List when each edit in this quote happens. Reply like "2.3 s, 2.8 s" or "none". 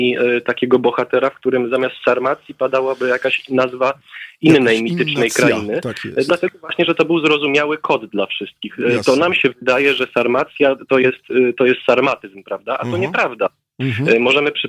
none